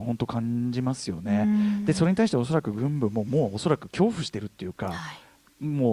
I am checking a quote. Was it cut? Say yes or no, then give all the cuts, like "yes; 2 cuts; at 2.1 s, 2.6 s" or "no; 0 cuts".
no; 0 cuts